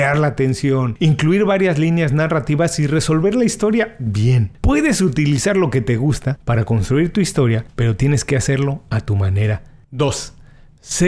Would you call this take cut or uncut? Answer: cut